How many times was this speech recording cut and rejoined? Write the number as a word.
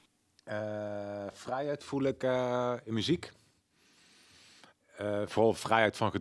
zero